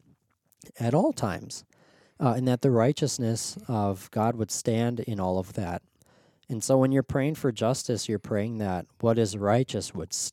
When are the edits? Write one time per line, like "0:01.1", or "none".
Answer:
none